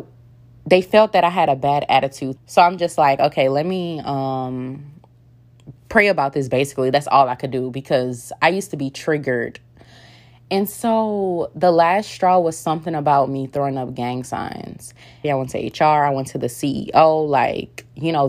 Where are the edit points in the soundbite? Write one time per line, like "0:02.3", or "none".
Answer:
0:02.4
0:15.2